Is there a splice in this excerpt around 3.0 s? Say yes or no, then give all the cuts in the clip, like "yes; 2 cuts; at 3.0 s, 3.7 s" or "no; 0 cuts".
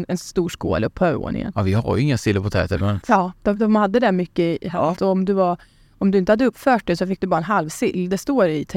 yes; 2 cuts; at 3.0 s, 4.9 s